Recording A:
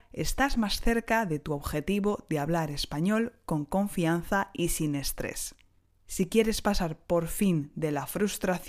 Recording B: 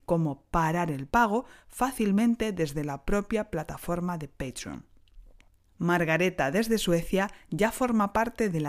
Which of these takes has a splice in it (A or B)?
A